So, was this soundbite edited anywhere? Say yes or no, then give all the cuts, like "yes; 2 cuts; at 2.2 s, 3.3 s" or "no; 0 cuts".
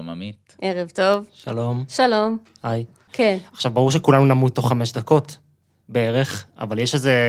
yes; 1 cut; at 3.1 s